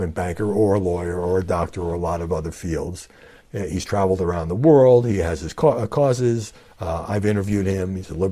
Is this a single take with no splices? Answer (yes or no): no